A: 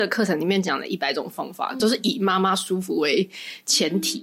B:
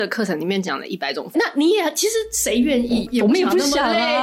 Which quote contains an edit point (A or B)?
B